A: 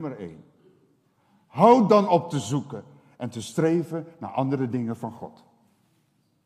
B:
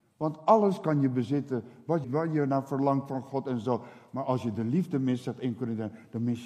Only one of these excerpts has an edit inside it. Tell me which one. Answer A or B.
B